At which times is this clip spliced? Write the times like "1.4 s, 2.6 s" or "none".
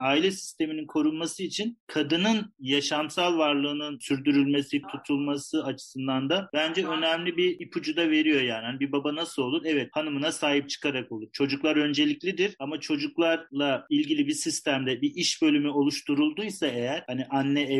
4.8 s